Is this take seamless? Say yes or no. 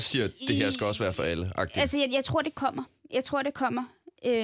yes